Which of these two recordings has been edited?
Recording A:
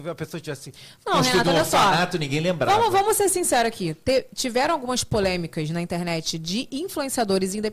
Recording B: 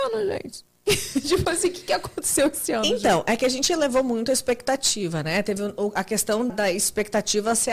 B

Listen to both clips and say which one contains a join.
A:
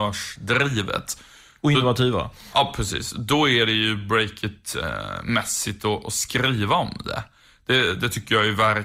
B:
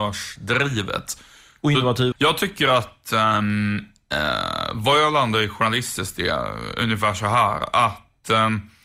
B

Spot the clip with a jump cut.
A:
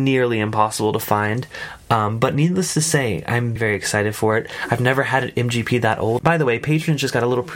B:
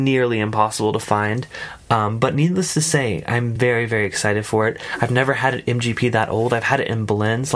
A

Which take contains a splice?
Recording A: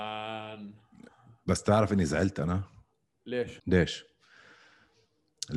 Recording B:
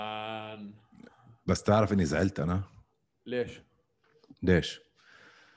A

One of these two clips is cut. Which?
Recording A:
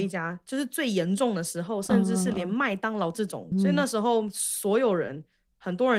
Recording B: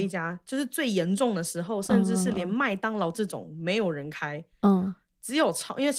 A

